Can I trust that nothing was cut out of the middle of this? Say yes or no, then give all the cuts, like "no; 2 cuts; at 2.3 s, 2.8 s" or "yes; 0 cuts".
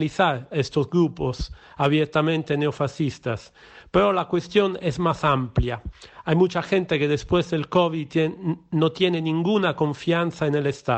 yes; 0 cuts